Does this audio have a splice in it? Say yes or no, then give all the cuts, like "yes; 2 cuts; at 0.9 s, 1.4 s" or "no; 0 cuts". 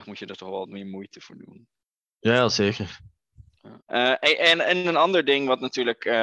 yes; 1 cut; at 3.8 s